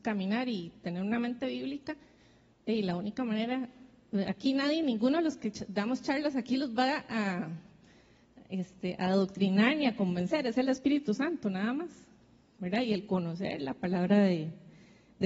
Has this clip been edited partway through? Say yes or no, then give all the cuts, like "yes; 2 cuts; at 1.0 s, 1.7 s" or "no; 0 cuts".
no; 0 cuts